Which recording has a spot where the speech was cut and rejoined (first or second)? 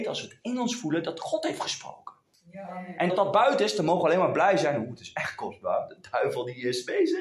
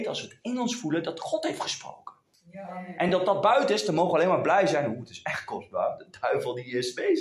first